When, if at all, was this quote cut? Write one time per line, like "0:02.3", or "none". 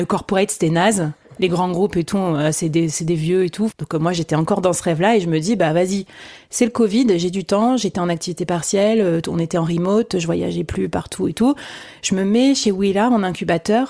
0:03.7